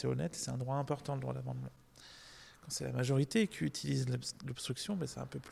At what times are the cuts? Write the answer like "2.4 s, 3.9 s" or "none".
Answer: none